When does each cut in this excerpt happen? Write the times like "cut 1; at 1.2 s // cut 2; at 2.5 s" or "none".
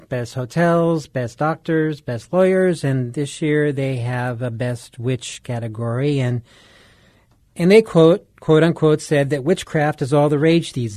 none